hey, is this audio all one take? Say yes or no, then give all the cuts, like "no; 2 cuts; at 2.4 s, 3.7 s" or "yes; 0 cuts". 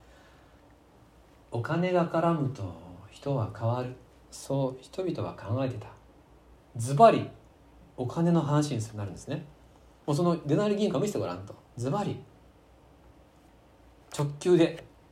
no; 2 cuts; at 6.6 s, 11.6 s